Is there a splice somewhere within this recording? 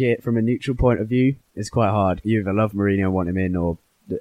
no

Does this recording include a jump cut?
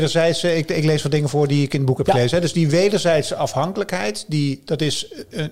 no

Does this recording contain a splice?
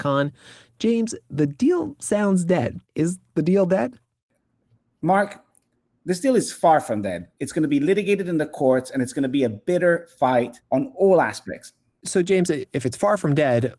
yes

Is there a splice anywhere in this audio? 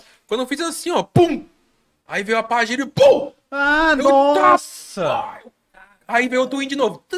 no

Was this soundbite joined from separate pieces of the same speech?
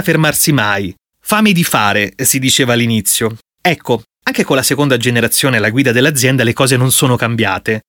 no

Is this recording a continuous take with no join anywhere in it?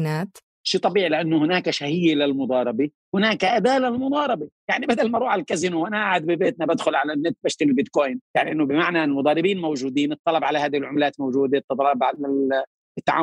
yes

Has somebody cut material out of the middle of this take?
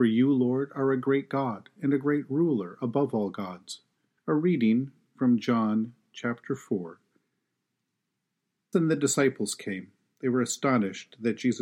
yes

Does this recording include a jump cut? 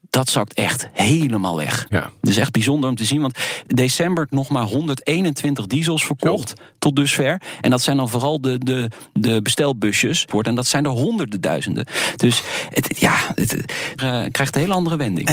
yes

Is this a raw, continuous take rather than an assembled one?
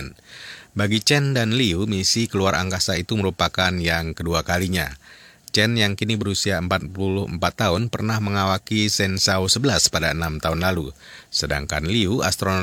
yes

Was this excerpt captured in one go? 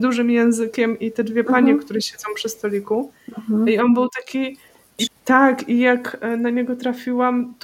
no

